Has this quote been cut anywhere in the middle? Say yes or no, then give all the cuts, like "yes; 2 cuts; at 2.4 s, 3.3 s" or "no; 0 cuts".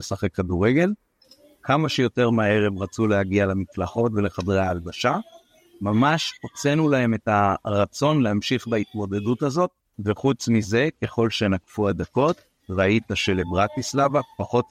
yes; 1 cut; at 9.9 s